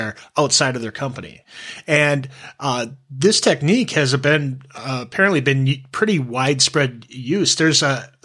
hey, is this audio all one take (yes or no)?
yes